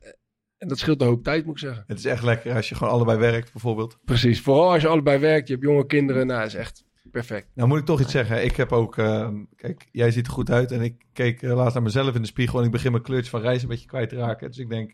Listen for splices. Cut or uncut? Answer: uncut